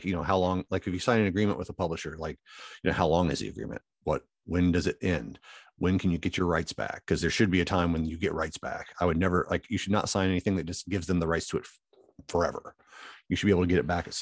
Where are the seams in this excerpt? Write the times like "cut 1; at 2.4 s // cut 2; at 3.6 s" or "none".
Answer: none